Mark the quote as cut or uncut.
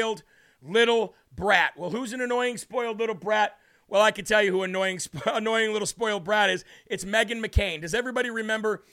uncut